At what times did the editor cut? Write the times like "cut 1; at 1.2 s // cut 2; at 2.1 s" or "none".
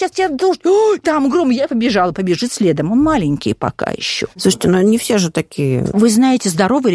none